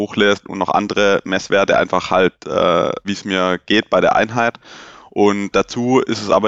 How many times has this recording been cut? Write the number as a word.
two